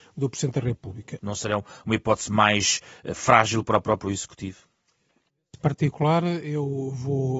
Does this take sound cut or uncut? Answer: cut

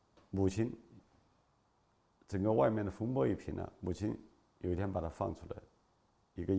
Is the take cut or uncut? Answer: uncut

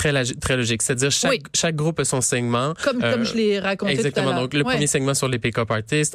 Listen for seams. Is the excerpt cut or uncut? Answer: uncut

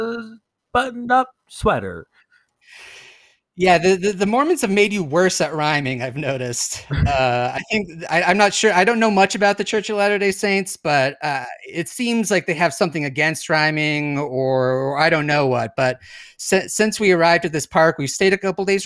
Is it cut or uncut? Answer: uncut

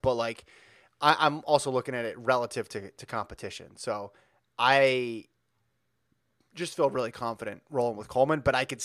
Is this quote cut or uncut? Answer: uncut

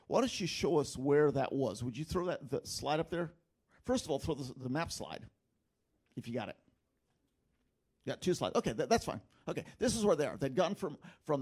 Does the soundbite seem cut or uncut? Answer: uncut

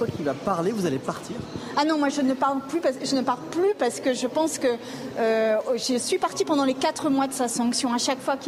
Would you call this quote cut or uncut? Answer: uncut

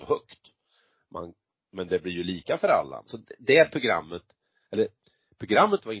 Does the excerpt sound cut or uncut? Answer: cut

